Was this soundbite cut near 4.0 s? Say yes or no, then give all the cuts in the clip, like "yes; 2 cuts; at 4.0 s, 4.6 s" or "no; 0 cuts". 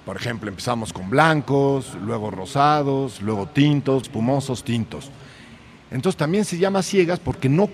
yes; 1 cut; at 4.0 s